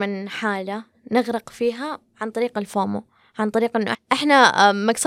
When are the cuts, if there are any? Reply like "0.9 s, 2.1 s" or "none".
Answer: 3.9 s